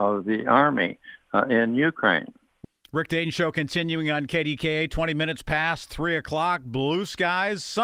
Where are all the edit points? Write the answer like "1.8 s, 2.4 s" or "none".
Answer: none